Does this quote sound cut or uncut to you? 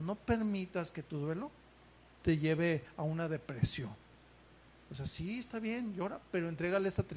uncut